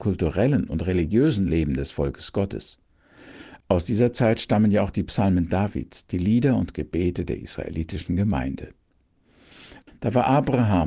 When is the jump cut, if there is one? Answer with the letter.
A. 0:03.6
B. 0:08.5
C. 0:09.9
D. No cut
C